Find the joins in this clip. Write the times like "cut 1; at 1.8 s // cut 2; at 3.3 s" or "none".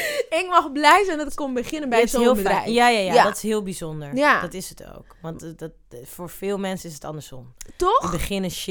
none